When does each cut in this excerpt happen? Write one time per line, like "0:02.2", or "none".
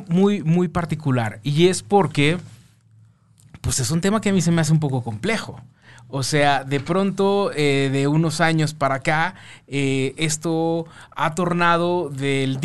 none